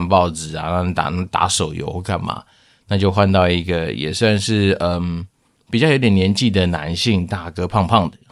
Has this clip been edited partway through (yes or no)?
no